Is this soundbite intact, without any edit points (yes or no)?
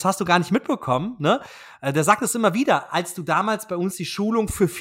yes